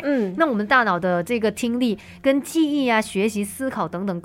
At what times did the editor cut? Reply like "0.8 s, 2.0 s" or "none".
none